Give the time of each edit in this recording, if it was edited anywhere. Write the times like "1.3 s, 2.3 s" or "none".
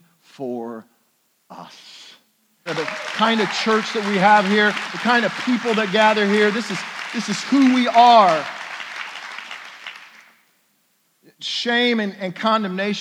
2.7 s